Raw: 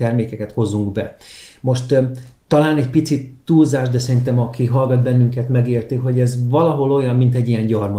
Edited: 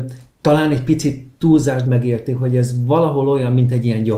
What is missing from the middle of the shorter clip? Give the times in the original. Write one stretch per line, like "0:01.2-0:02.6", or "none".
0:03.9-0:05.5